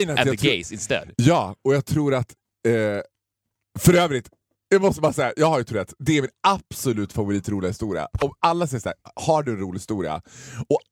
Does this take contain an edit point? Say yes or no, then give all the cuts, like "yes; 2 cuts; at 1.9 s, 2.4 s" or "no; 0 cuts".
no; 0 cuts